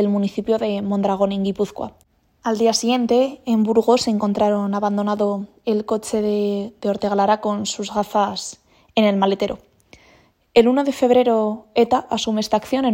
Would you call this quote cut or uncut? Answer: uncut